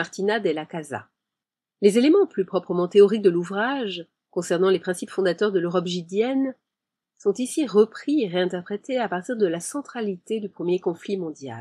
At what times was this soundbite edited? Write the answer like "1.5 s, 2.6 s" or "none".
none